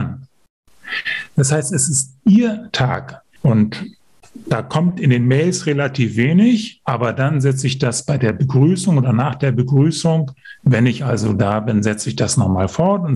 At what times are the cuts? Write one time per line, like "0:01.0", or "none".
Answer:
0:03.4